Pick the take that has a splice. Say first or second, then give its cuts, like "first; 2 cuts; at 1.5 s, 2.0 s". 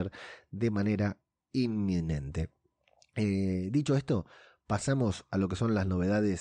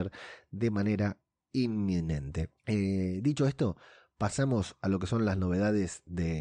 second; 1 cut; at 2.6 s